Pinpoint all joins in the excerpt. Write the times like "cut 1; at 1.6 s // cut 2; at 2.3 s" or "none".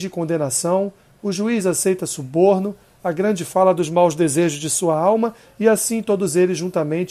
none